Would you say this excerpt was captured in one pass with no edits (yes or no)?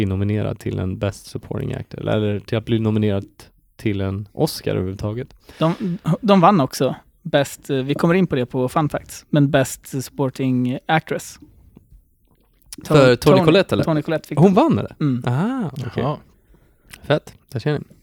yes